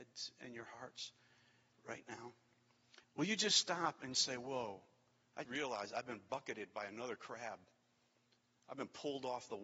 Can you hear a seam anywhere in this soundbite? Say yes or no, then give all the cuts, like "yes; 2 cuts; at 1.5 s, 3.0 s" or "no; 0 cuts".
yes; 3 cuts; at 3.0 s, 4.1 s, 5.4 s